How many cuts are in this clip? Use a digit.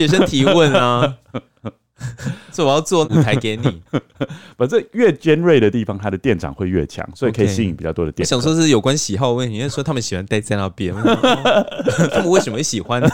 0